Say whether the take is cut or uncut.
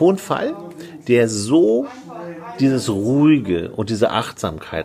uncut